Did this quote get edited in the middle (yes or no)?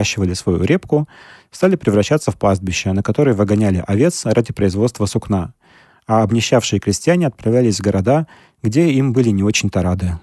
no